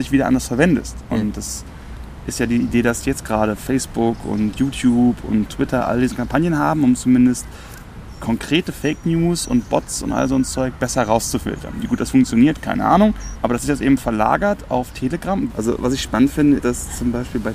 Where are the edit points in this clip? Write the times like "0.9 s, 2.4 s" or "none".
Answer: 13.3 s, 15.5 s, 16.6 s